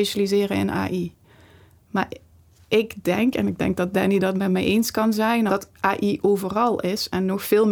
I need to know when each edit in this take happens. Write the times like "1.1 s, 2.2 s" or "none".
5.5 s